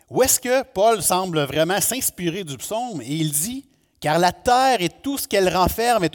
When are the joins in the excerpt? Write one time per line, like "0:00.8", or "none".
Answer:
none